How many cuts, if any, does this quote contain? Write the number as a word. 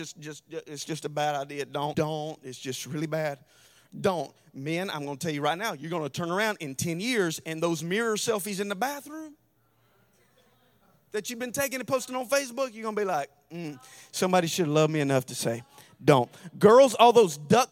one